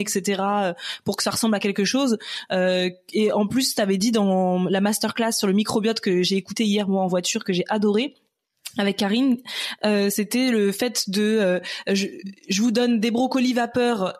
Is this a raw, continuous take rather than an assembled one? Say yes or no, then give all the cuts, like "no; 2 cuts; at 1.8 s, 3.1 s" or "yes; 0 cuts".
yes; 0 cuts